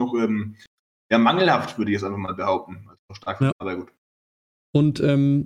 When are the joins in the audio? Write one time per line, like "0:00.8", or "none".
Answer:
0:03.5